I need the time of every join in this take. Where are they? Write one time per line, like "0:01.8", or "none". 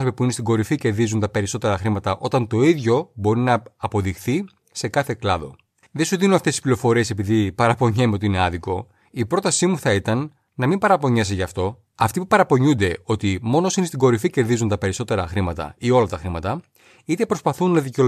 0:11.8